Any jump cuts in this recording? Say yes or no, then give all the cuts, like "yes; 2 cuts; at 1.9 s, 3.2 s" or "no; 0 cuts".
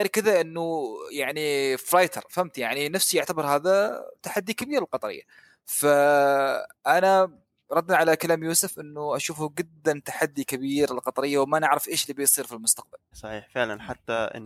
yes; 1 cut; at 13.1 s